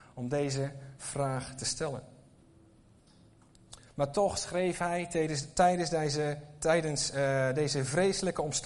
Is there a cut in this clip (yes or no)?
yes